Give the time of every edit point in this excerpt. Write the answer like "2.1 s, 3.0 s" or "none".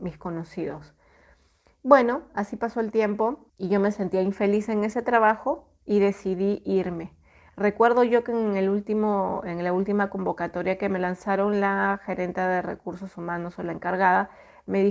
3.5 s